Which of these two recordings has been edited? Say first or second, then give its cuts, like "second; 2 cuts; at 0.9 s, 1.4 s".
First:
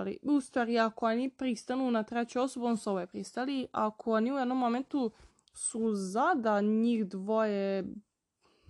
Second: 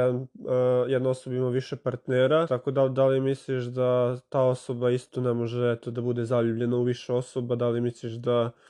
second; 1 cut; at 2.4 s